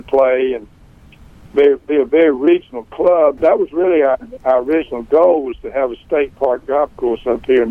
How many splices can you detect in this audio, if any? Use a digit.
1